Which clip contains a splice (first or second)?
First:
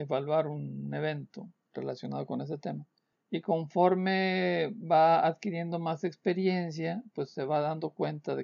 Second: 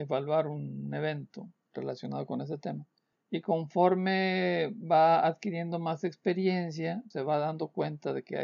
second